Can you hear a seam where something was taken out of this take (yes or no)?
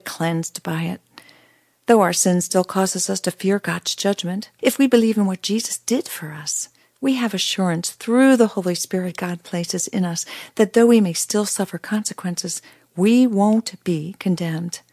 yes